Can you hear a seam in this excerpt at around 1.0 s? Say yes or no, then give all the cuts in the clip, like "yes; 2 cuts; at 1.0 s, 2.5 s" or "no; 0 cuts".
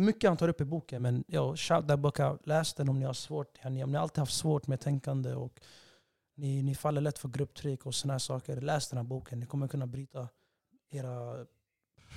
no; 0 cuts